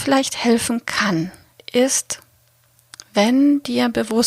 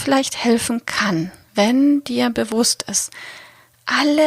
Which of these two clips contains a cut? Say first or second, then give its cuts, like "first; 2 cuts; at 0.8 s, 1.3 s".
second; 1 cut; at 1.5 s